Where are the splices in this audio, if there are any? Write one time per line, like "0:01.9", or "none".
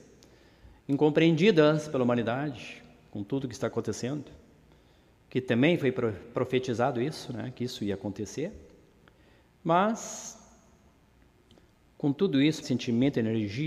0:12.6